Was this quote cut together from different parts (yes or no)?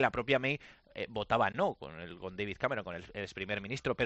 no